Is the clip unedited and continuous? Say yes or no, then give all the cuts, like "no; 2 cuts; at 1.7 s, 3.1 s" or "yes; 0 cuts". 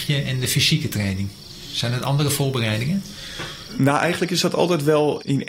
yes; 0 cuts